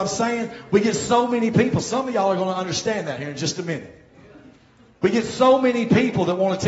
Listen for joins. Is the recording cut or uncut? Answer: uncut